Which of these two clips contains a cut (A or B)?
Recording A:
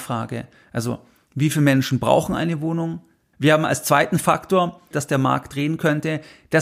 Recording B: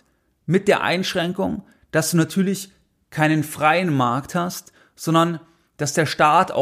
A